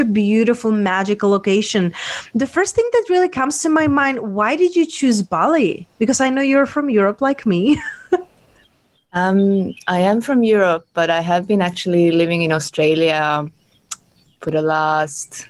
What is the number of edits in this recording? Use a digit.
0